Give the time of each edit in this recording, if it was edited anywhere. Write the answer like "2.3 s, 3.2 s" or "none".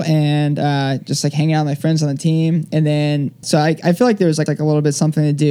3.4 s, 4.5 s